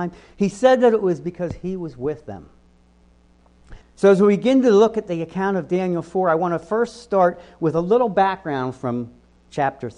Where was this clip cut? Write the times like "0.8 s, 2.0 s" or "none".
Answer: 3.8 s